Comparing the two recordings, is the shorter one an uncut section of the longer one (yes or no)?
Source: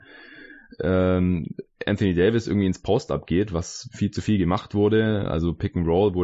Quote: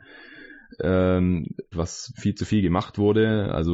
no